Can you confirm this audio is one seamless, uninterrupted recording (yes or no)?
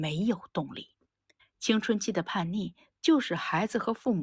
no